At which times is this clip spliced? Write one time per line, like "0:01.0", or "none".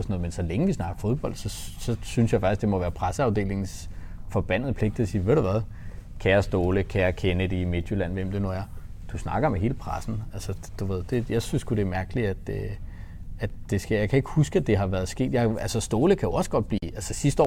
none